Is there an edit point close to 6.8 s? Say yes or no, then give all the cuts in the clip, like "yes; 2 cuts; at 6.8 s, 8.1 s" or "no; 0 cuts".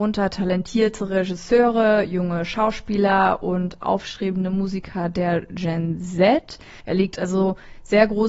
yes; 1 cut; at 6.8 s